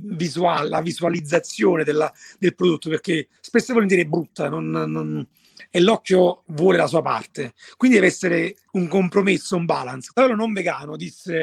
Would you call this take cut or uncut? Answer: cut